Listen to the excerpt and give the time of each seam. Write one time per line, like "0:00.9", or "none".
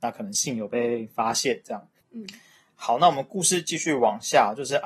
0:02.0